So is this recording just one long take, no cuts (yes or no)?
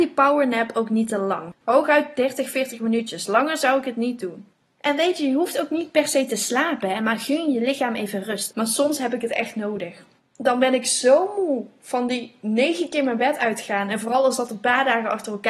no